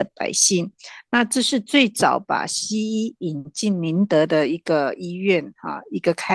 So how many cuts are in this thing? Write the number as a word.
zero